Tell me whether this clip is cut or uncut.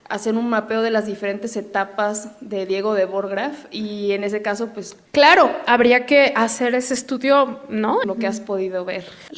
cut